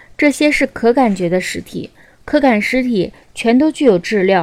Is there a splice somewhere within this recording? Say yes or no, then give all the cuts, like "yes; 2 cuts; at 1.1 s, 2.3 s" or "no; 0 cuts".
no; 0 cuts